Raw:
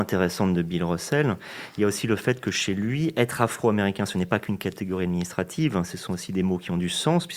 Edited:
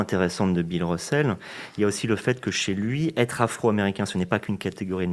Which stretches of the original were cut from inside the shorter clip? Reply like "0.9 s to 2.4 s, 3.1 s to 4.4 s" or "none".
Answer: none

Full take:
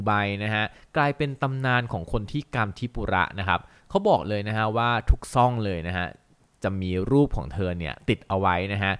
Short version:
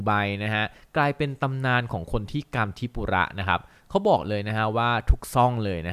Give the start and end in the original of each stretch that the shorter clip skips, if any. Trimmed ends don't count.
none

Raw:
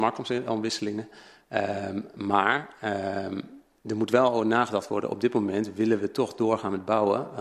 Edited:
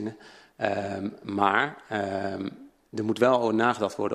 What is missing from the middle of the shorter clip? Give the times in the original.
none

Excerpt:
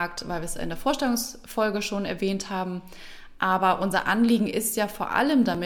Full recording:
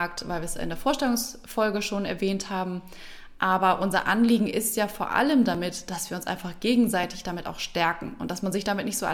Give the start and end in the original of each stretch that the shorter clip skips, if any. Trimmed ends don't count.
none

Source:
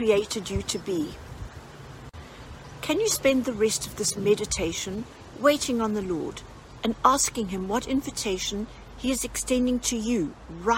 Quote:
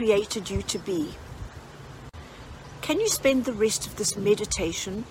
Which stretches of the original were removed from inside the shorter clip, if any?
none

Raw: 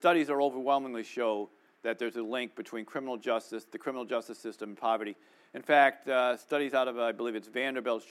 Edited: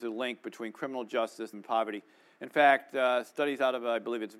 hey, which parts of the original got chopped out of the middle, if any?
3.7 s to 4.7 s

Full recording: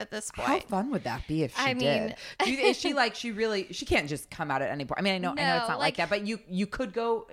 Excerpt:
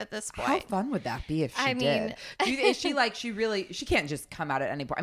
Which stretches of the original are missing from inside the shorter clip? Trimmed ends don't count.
none

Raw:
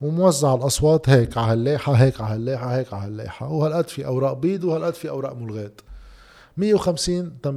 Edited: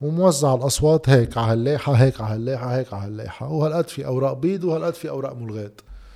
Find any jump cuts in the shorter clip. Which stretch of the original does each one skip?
none

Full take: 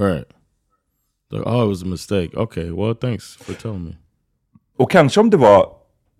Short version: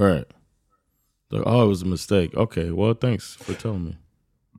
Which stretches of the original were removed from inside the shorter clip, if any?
none

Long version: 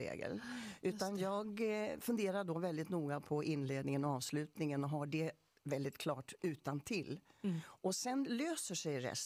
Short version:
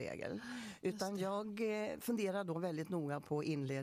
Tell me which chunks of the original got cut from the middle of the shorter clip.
none

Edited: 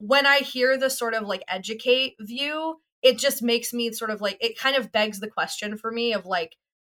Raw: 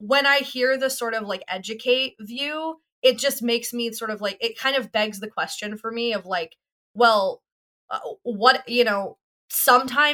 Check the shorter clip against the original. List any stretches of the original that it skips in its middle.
none

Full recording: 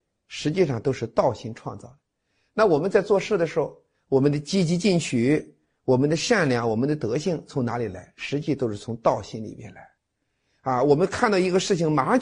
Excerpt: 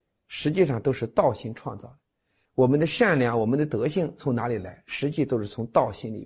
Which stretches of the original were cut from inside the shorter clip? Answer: 2.5 s to 5.7 s

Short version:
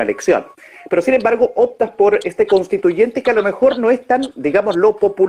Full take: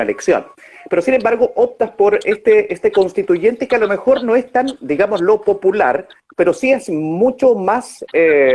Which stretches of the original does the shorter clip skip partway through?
2.2 s to 2.7 s

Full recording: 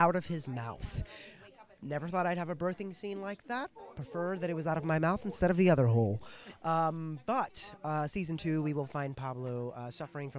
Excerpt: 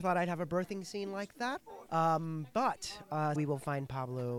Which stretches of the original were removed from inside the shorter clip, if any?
3.9 s to 6.6 s, 8.1 s to 8.6 s

